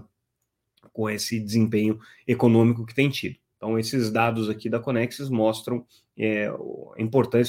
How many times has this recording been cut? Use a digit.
1